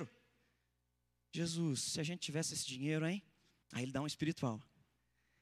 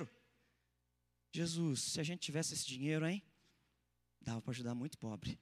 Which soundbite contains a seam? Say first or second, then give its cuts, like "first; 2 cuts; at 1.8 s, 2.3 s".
first; 1 cut; at 3.6 s